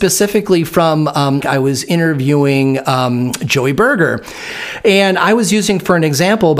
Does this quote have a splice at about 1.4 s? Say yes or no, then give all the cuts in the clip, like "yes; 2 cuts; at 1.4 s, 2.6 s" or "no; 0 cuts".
yes; 1 cut; at 1.4 s